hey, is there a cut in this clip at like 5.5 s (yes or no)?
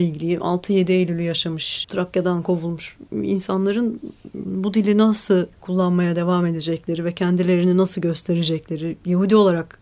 yes